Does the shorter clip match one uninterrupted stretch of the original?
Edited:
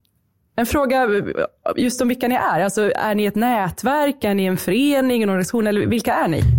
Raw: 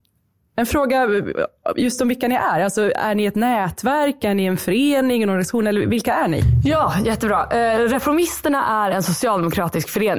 yes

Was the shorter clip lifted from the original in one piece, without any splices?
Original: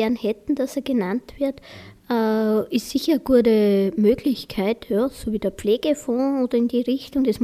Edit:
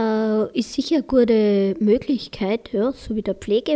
yes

